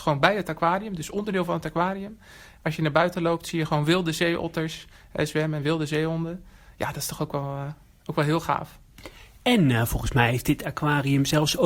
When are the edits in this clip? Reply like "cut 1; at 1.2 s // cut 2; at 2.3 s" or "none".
none